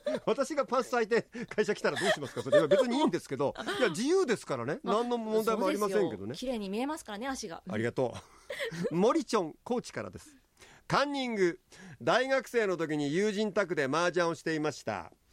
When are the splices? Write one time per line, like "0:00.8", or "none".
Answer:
none